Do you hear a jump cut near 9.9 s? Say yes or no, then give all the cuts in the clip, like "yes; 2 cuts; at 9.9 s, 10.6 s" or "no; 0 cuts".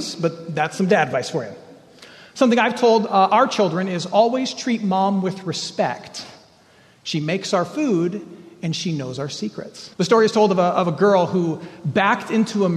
yes; 1 cut; at 9.9 s